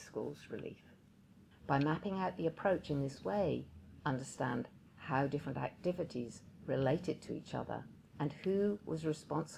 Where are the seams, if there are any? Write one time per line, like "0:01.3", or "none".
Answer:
0:01.5
0:04.0

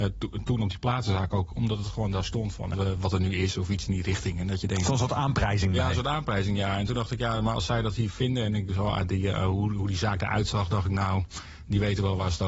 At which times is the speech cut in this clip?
0:02.7

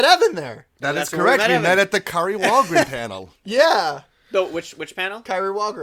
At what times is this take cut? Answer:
none

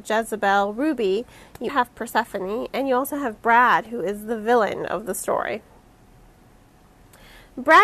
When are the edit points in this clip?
0:01.7

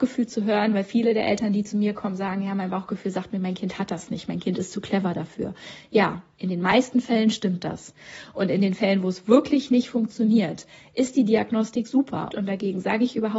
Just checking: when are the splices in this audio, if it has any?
0:12.3

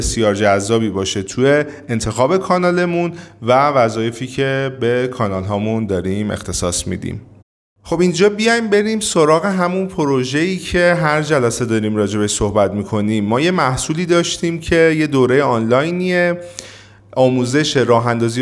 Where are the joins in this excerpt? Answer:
none

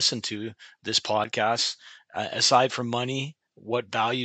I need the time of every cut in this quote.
none

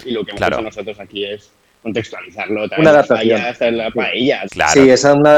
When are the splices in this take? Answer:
0:04.5

